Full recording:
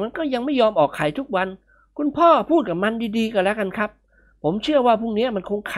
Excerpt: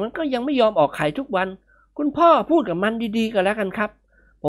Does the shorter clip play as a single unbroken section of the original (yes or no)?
yes